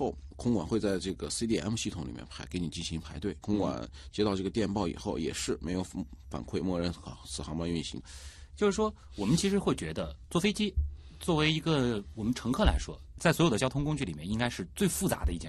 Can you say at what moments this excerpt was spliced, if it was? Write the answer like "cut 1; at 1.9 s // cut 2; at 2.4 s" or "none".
cut 1; at 3.4 s // cut 2; at 8.0 s